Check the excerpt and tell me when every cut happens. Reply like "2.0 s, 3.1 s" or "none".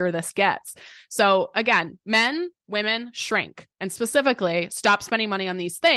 2.6 s